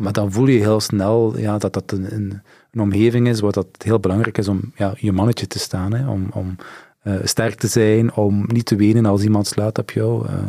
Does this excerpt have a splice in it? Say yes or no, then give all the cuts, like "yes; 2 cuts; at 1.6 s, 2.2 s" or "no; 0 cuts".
no; 0 cuts